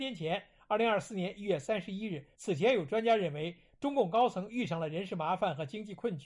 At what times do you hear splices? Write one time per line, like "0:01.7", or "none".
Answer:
0:02.3